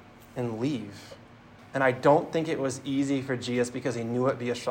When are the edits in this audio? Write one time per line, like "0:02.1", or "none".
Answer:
0:01.6